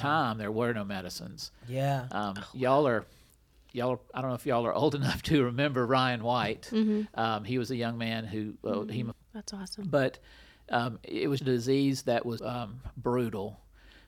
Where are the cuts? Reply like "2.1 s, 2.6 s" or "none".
9.1 s, 11.4 s, 12.4 s